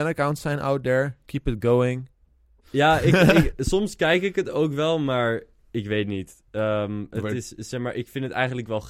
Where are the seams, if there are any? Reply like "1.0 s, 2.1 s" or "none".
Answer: 2.6 s